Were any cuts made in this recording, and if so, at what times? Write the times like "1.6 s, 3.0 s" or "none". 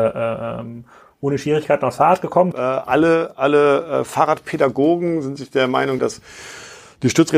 2.5 s, 6.0 s